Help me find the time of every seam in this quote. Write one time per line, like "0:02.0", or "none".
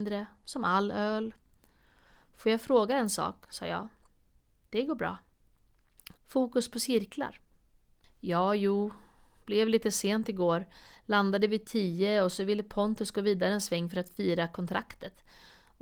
0:06.2
0:08.0